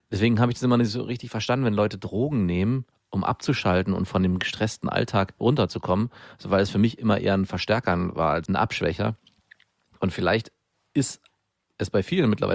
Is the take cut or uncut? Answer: cut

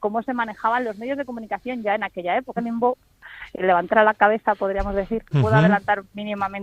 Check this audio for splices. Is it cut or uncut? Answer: cut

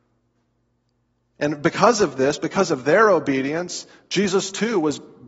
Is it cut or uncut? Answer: uncut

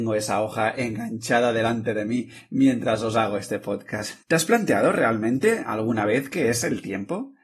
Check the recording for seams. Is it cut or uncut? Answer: cut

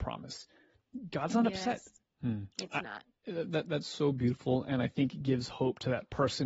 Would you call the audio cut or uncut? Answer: cut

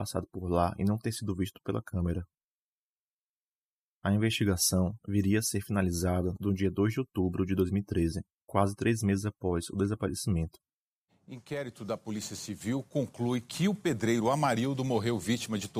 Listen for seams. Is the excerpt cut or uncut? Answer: cut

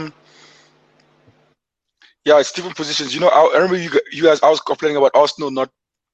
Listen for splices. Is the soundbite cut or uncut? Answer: uncut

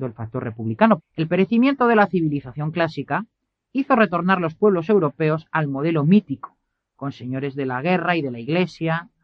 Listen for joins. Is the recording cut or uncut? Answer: cut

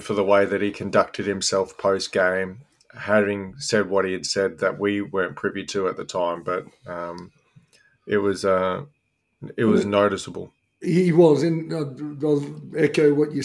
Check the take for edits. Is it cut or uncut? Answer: uncut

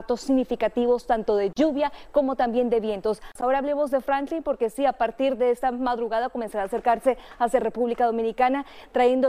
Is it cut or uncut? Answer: uncut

